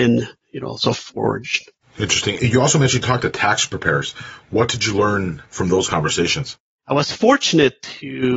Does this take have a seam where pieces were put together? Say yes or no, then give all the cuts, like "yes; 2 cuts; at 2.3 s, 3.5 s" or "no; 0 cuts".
no; 0 cuts